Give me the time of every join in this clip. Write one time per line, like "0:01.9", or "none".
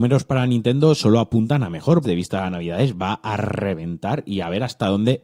0:02.0